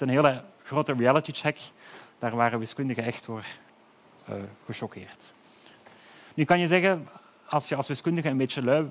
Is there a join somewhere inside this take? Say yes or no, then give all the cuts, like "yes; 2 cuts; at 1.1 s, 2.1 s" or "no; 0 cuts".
no; 0 cuts